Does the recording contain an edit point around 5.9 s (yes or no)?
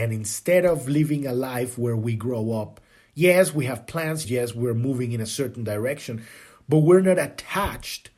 no